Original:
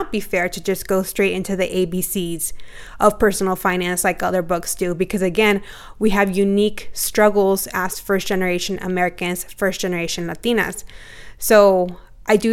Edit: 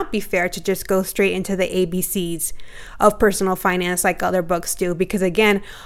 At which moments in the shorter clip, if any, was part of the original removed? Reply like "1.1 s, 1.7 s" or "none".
none